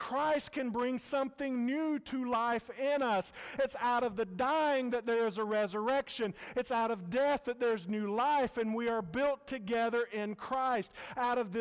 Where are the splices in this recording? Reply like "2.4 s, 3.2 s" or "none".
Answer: none